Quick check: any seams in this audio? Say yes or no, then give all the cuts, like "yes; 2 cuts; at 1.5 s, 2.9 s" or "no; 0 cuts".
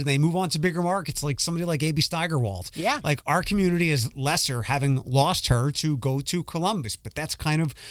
no; 0 cuts